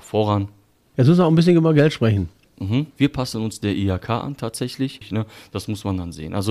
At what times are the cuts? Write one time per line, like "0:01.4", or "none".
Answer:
0:02.9
0:05.0